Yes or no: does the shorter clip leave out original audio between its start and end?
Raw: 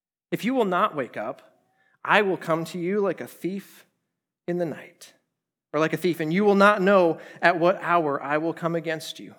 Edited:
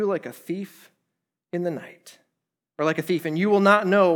no